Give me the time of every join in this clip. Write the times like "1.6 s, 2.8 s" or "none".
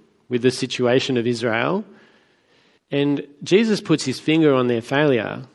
2.8 s